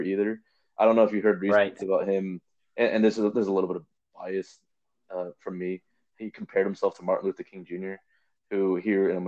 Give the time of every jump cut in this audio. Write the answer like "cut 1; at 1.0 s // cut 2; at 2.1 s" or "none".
none